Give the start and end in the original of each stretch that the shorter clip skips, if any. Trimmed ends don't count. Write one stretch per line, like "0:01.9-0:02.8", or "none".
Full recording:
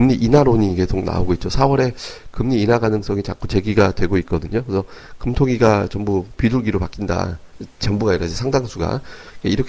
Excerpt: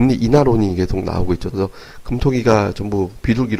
0:01.5-0:04.6